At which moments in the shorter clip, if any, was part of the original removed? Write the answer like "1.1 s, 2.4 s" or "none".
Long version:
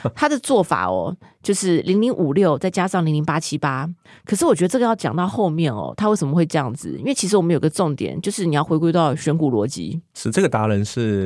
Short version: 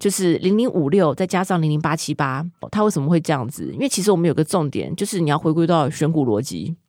2.6 s